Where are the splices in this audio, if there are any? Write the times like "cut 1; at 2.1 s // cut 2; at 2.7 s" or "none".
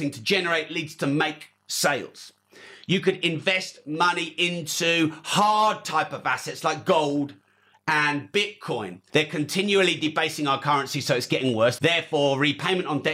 cut 1; at 9.1 s // cut 2; at 11.8 s